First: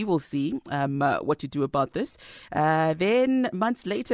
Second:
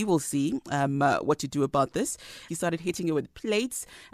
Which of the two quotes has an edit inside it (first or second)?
second